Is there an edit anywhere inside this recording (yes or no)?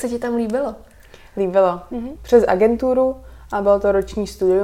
yes